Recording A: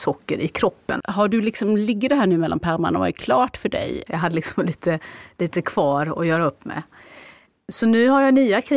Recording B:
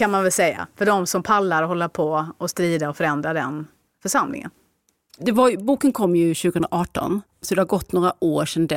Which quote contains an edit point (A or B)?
A